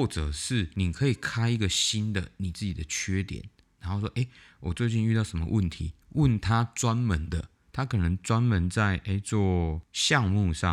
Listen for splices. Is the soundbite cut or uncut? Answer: uncut